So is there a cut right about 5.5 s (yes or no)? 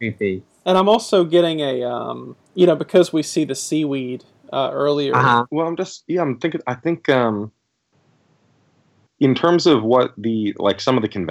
yes